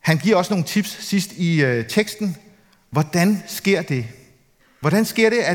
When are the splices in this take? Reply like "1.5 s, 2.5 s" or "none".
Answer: none

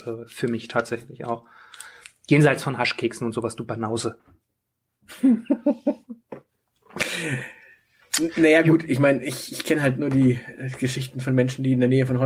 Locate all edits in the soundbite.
none

